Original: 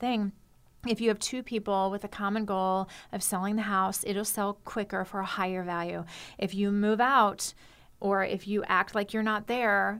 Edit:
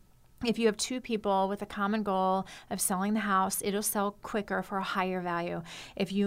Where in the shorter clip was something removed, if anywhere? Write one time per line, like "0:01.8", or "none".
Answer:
none